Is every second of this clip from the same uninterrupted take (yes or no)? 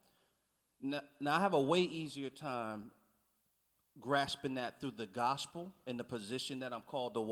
yes